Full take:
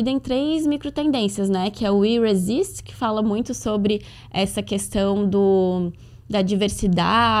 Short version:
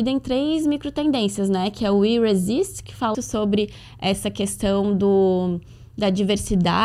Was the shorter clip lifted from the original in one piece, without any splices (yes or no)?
no